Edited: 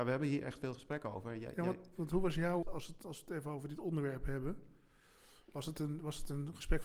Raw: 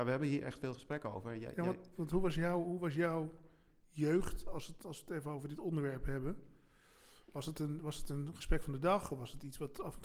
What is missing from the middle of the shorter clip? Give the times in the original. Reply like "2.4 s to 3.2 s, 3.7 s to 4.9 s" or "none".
2.6 s to 4.4 s